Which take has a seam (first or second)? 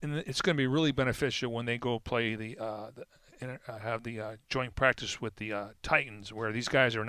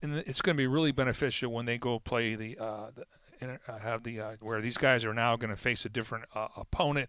second